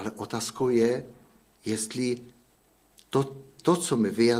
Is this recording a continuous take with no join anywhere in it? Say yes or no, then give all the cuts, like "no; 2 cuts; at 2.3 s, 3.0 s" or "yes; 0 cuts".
yes; 0 cuts